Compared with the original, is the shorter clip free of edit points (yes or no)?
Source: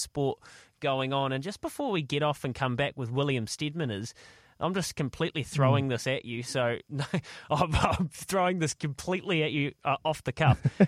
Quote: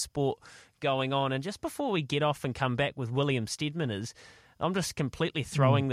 yes